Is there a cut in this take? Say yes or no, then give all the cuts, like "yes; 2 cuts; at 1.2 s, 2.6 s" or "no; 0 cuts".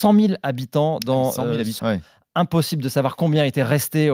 yes; 1 cut; at 1.8 s